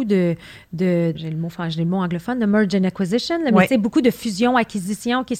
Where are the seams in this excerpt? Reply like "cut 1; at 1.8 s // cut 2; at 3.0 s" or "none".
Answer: cut 1; at 1.2 s